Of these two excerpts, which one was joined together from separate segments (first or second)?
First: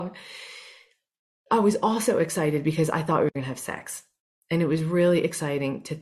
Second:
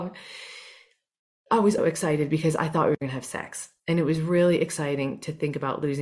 second